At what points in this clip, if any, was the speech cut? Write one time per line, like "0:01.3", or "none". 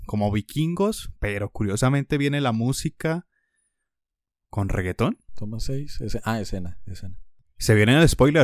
0:05.3
0:07.4